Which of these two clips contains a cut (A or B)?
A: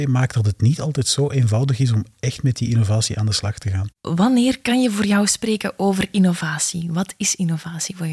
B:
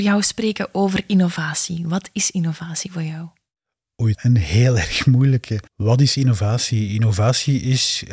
B